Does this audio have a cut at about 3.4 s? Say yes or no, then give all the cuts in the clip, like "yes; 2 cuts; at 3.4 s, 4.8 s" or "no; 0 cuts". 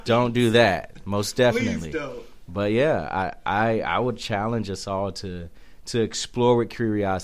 no; 0 cuts